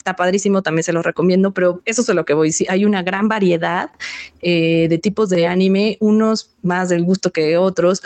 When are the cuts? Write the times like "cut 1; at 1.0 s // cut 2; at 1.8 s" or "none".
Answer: cut 1; at 1.8 s